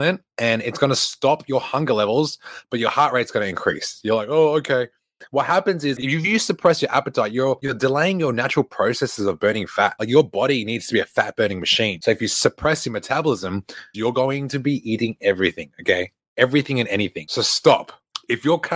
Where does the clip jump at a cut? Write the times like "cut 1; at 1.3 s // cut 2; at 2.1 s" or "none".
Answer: cut 1; at 6.0 s // cut 2; at 13.9 s